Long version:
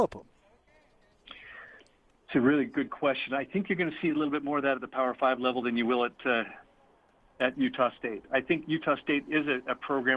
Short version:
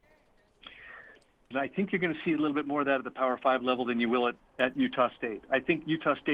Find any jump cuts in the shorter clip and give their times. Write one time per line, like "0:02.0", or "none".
0:01.5
0:04.4